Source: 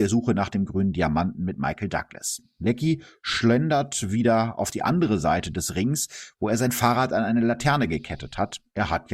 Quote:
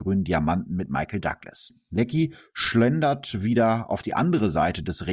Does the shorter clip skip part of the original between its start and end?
no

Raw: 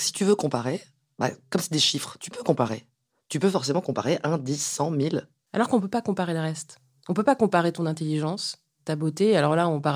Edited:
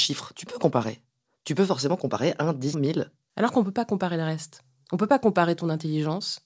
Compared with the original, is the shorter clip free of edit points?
no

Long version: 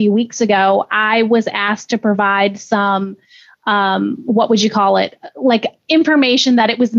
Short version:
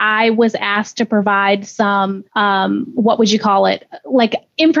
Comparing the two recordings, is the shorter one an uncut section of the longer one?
no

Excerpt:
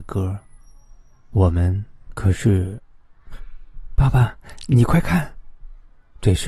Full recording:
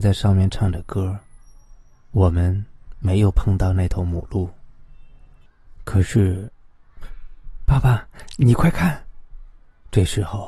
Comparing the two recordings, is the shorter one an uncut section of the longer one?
no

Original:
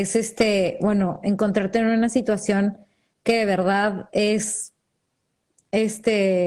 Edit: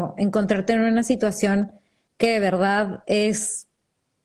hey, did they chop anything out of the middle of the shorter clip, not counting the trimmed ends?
no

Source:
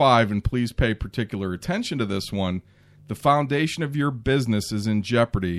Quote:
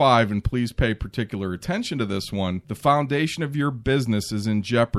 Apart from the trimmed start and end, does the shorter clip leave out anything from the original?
yes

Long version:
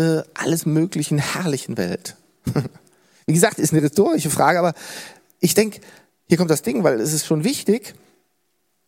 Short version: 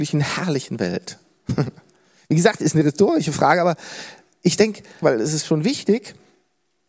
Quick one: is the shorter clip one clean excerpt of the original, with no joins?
no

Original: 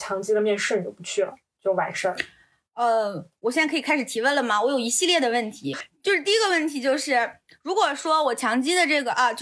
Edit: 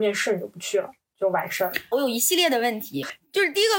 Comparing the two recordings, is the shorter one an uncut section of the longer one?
no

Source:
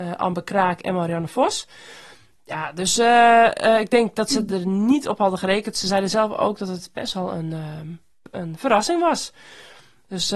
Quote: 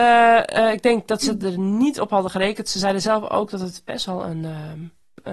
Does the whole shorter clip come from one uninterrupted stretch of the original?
yes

